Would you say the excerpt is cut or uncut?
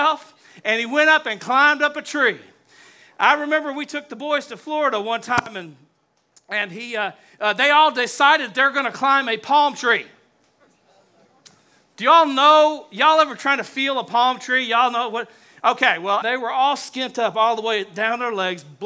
cut